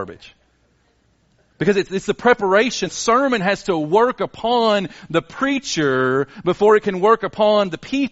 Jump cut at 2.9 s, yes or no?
yes